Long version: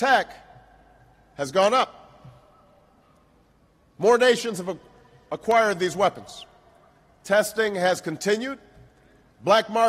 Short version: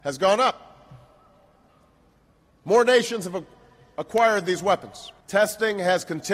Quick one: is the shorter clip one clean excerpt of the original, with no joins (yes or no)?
no